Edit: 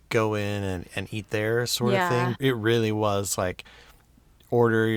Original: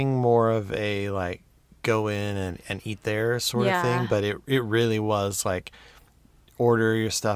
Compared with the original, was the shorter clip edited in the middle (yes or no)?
yes